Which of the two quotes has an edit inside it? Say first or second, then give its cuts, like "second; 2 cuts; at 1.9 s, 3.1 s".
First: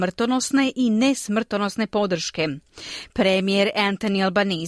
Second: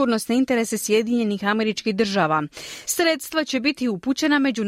second; 1 cut; at 2.8 s